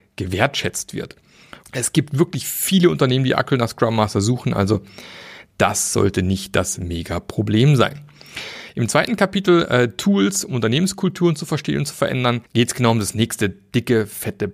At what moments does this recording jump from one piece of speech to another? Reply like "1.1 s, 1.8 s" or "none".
1.6 s, 12.5 s